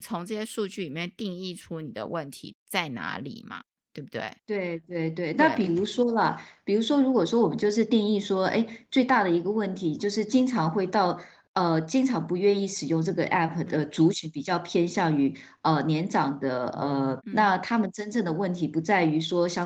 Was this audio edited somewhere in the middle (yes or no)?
yes